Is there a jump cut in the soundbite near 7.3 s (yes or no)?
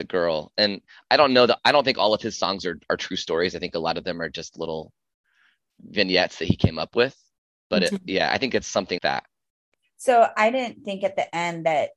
no